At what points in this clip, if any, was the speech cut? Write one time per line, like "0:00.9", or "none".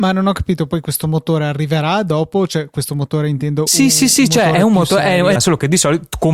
0:05.4